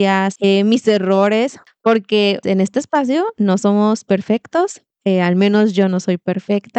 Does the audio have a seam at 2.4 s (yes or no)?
yes